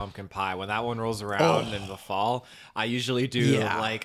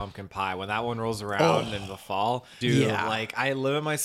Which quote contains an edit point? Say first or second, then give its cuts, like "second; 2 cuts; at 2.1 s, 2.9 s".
second; 1 cut; at 2.6 s